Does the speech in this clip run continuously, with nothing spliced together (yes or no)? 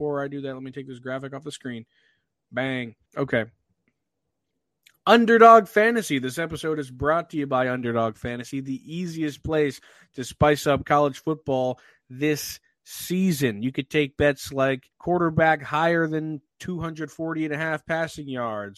no